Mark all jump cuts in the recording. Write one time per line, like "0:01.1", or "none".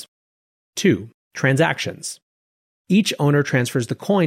0:02.7